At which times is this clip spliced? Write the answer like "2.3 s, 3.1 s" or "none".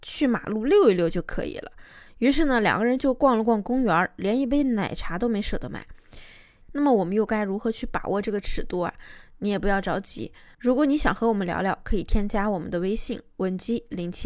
6.6 s